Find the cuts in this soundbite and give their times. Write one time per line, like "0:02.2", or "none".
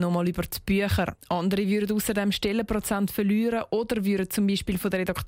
0:01.2